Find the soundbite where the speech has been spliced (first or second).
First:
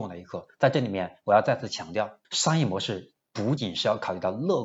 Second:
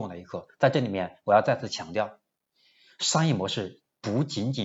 first